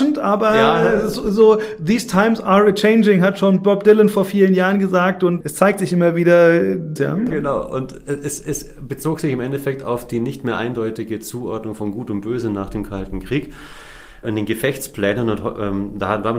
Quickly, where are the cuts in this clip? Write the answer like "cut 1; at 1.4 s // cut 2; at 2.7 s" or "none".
cut 1; at 7.0 s // cut 2; at 14.2 s